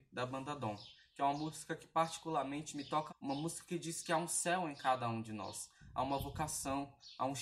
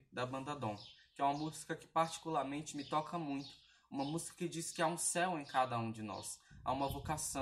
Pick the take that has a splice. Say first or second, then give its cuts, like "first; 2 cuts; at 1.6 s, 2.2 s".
first; 1 cut; at 3.1 s